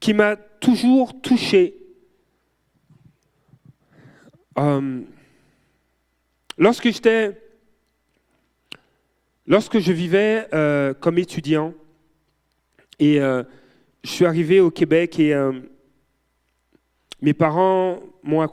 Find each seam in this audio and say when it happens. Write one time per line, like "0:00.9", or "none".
none